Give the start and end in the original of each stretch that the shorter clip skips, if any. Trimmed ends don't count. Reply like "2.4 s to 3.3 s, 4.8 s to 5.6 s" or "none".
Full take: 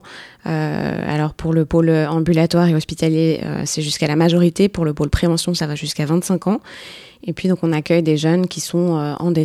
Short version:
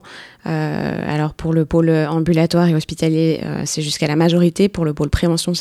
none